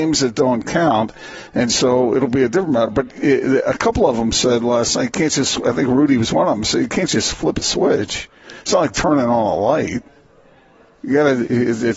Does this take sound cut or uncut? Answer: uncut